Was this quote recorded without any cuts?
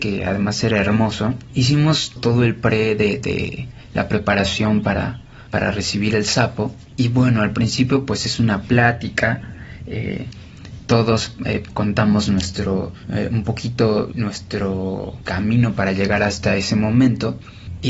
yes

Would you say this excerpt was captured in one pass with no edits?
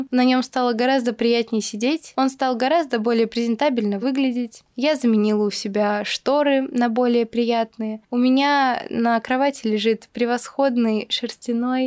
yes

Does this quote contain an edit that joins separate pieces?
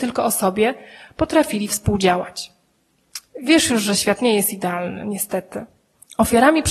no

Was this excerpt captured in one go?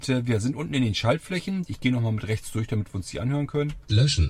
yes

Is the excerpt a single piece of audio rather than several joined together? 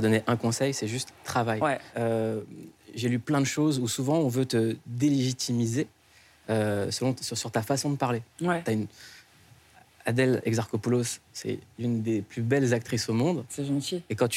yes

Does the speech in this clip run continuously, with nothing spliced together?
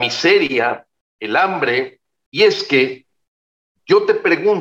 no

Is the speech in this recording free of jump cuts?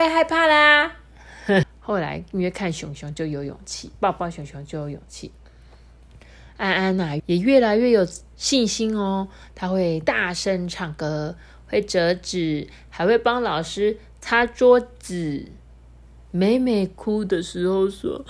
no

